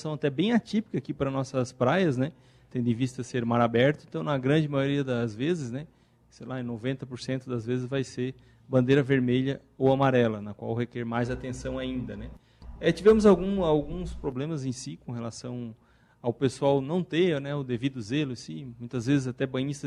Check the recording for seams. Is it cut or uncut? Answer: uncut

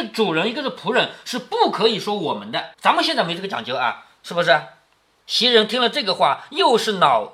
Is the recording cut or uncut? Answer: cut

